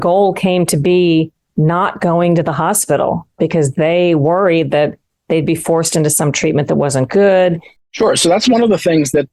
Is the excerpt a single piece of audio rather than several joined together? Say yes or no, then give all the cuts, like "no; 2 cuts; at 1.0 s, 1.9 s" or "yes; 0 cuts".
no; 2 cuts; at 3.4 s, 7.8 s